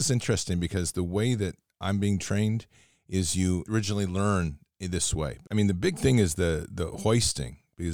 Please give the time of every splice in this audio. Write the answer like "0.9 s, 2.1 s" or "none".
3.7 s, 5.4 s